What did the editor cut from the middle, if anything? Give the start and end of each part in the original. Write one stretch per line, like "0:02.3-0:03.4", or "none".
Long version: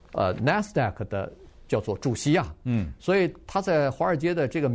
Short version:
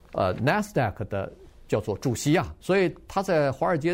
0:02.6-0:03.0